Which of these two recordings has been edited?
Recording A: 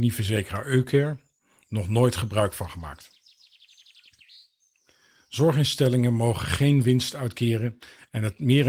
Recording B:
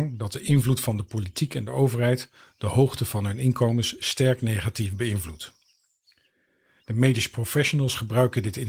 B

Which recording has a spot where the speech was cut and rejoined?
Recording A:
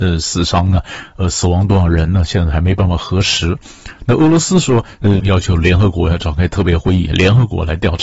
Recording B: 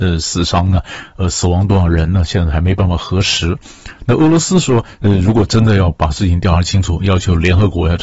A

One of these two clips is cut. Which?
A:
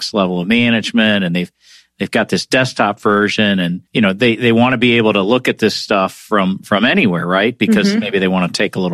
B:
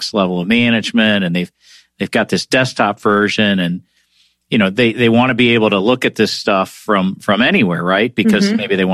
A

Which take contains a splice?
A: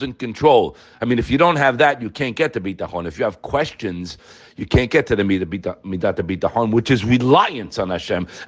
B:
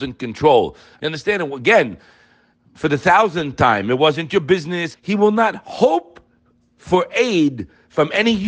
B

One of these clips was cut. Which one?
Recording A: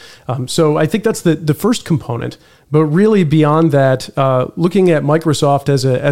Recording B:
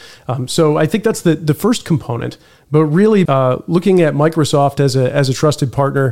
B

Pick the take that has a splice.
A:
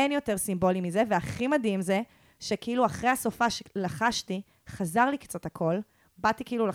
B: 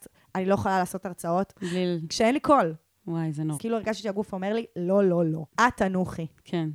B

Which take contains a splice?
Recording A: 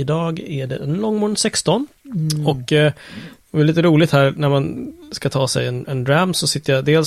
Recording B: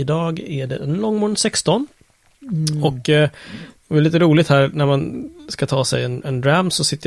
A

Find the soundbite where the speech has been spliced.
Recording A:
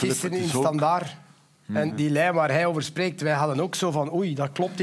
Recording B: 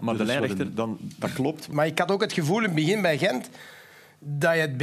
B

